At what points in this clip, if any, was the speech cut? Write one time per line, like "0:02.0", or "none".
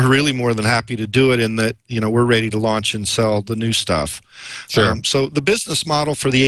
none